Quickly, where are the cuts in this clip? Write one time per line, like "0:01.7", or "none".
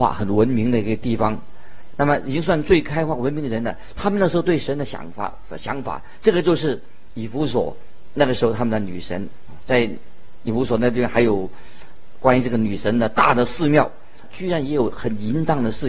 0:01.9
0:14.2